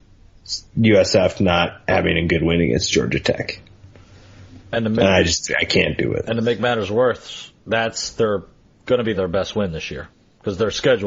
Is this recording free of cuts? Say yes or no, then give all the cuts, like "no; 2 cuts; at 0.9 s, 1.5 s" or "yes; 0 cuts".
yes; 0 cuts